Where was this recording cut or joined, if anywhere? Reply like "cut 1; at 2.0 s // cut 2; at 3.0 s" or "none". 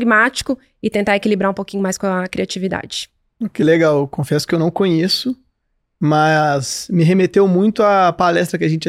none